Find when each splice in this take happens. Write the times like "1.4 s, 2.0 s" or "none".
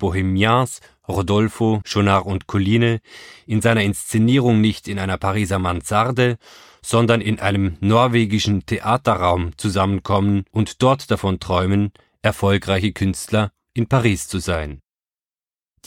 1.8 s, 7.2 s, 10.5 s